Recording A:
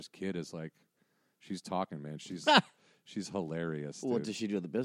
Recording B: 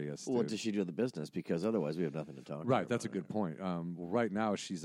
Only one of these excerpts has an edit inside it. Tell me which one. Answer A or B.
A